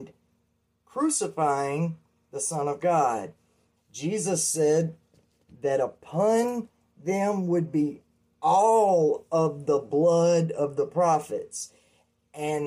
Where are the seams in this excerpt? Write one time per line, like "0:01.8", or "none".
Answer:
0:03.8